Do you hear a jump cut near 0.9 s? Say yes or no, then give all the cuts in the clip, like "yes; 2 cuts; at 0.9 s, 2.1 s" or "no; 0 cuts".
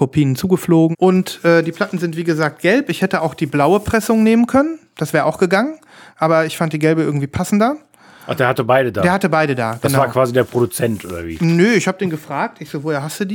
yes; 1 cut; at 0.9 s